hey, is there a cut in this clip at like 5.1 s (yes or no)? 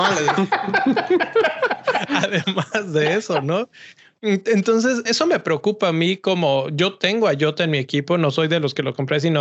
yes